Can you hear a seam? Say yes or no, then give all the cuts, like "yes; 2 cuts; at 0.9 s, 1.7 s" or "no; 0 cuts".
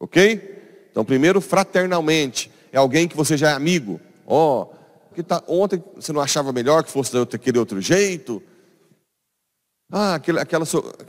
yes; 1 cut; at 5.1 s